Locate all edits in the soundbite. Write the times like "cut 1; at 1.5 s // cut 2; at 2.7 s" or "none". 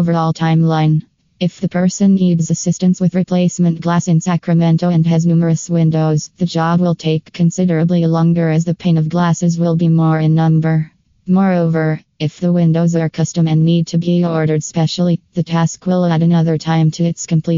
none